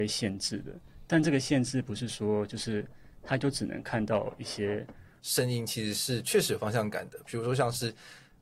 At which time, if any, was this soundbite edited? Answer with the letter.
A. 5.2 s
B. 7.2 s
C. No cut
A